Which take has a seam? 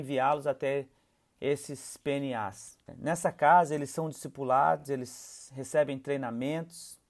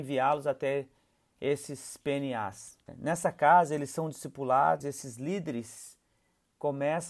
second; 1 cut; at 4.8 s

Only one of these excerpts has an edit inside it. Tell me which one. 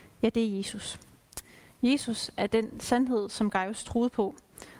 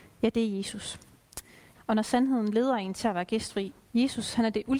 second; 2 cuts; at 1.7 s, 3.9 s

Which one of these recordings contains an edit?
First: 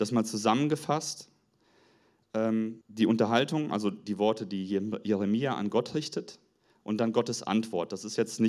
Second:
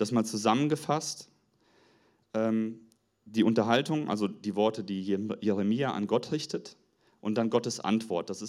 first; 1 cut; at 2.8 s

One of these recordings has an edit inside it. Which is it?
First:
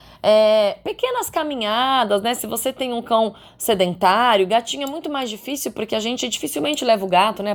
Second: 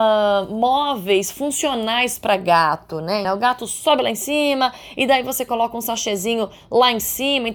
second; 2 cuts; at 3.2 s, 4.9 s

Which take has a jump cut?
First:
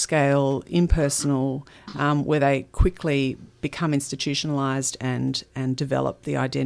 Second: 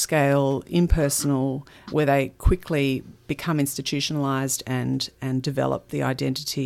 second; 1 cut; at 1.9 s

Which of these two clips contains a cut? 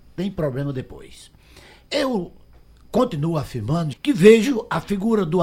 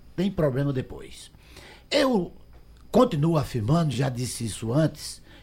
first; 1 cut; at 3.9 s

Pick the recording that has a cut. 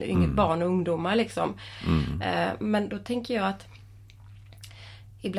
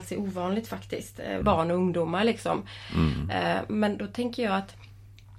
second; 1 cut; at 1.4 s

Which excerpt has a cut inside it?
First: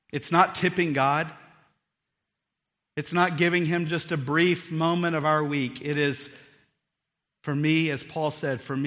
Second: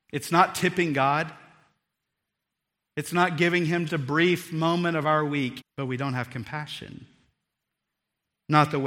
second; 2 cuts; at 3.9 s, 5.6 s

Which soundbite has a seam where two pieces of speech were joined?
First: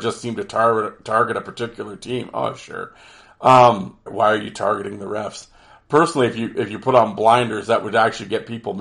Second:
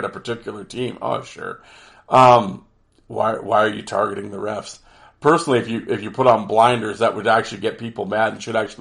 first; 1 cut; at 4.1 s

